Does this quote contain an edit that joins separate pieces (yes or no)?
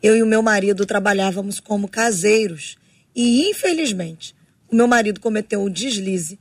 no